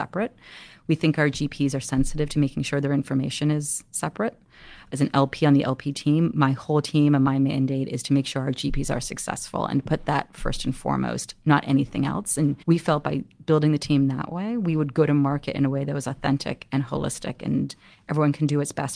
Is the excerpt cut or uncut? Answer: cut